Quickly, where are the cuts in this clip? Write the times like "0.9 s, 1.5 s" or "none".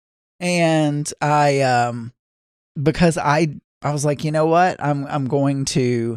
3.6 s

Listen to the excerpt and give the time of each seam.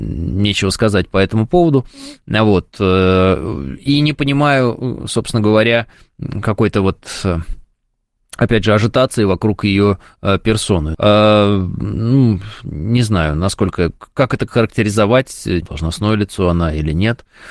10.9 s, 14.5 s, 15.6 s

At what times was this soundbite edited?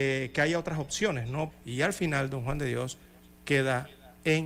1.5 s

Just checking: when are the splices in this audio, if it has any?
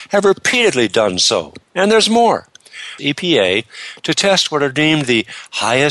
1.7 s, 3.0 s

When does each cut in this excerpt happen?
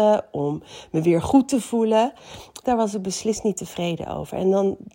2.6 s

